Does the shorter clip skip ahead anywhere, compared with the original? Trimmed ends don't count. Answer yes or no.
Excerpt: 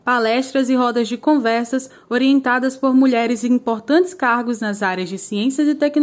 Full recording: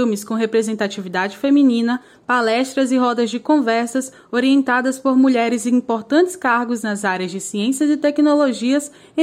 no